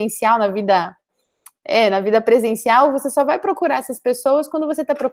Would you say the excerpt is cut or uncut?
uncut